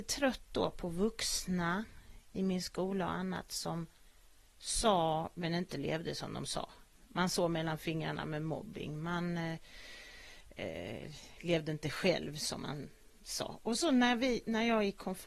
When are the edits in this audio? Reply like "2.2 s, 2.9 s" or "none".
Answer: none